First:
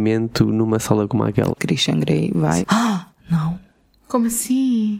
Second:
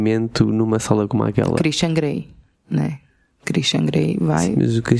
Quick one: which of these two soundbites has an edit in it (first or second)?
first